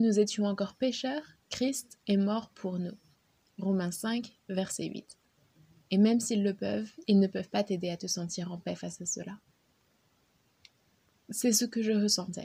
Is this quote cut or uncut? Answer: cut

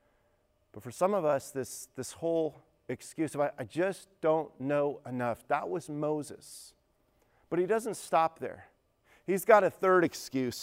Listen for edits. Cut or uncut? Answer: uncut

